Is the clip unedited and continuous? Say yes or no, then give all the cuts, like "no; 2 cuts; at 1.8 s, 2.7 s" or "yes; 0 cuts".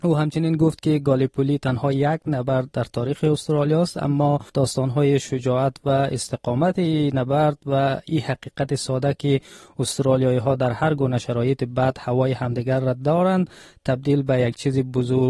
no; 1 cut; at 4.5 s